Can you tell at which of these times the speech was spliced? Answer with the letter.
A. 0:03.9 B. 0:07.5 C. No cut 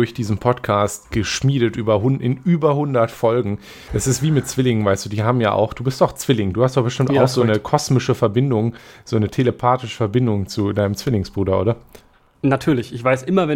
A